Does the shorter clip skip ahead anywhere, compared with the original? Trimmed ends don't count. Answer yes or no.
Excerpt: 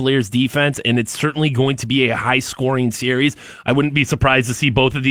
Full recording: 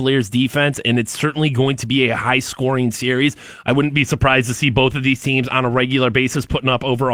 no